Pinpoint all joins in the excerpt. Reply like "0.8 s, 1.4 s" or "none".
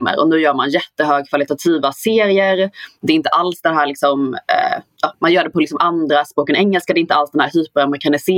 none

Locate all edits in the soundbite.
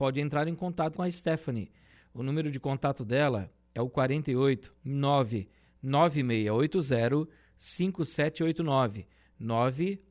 0.9 s, 4.8 s

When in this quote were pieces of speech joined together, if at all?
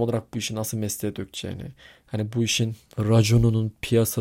none

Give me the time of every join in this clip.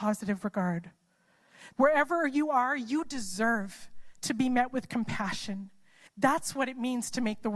1.7 s, 6.1 s

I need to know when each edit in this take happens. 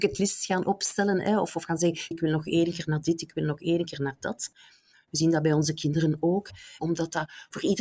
2.1 s, 6.8 s

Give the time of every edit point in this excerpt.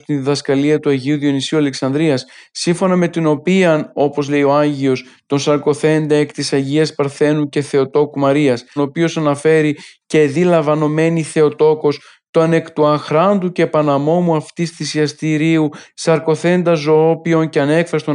8.8 s

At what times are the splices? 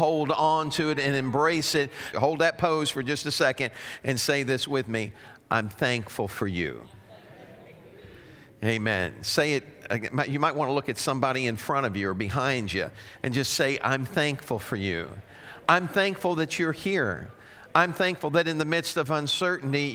2.1 s

